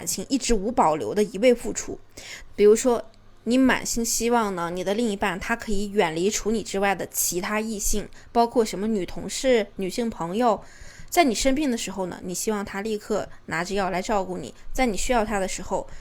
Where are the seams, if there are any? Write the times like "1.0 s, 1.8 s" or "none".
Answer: 2.5 s

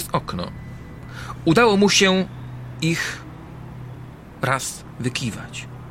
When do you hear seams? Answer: none

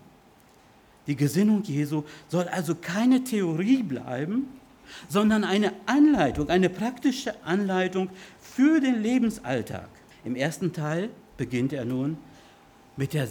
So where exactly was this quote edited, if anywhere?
10.1 s, 11.3 s

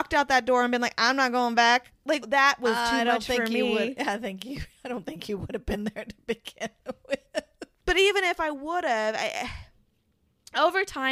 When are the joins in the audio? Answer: 2.2 s

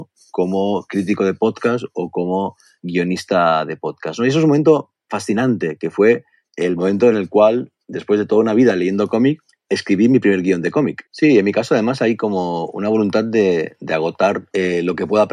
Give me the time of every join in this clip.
11.1 s

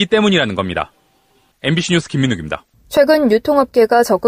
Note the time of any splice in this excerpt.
1.5 s

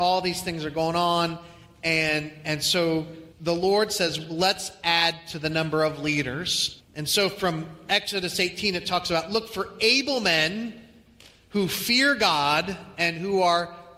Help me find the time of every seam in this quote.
3.3 s, 6.8 s

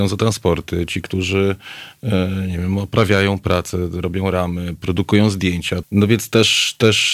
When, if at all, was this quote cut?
5.8 s

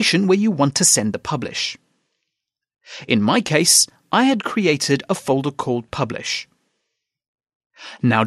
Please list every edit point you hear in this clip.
none

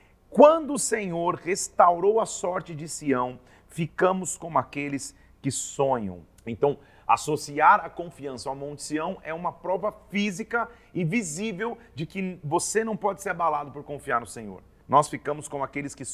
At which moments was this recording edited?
6.4 s, 14.8 s

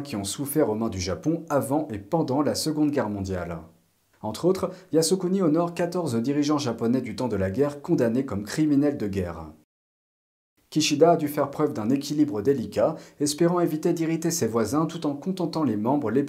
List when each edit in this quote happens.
none

